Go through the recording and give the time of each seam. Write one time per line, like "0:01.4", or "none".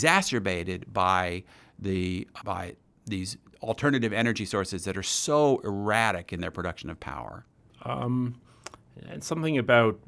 0:02.4
0:07.7